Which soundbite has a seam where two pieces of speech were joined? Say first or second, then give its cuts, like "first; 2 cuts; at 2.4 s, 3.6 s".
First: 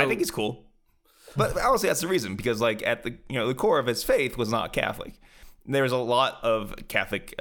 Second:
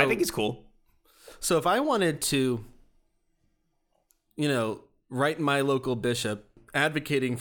first; 1 cut; at 1.4 s